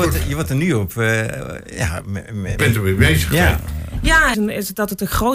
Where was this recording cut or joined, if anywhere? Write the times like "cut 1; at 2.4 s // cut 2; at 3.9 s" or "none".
cut 1; at 2.6 s // cut 2; at 4.3 s